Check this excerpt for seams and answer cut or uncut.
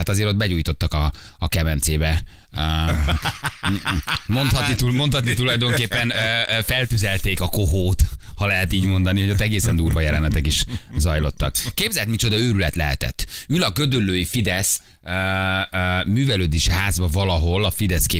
uncut